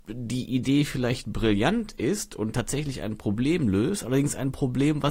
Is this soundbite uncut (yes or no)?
yes